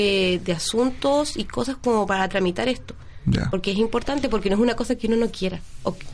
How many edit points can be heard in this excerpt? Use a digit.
0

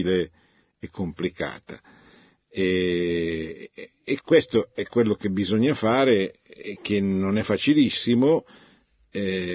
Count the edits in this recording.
1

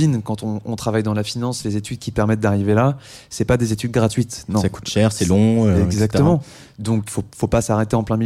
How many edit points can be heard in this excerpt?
1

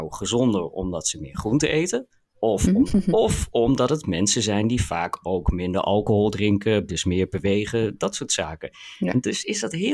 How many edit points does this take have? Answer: 2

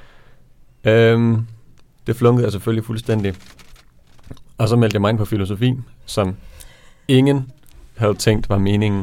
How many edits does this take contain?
0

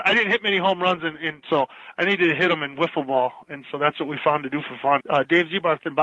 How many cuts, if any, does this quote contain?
2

